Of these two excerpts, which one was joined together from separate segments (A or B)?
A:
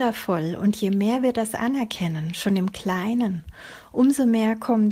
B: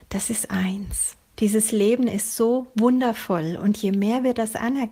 B